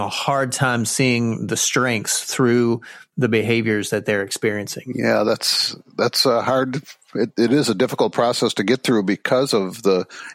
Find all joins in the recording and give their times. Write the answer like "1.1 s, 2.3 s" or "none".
none